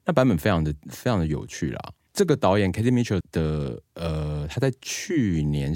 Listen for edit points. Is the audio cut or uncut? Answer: cut